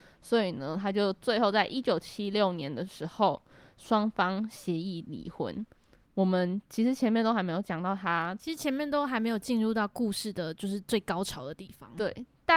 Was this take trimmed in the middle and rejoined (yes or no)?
yes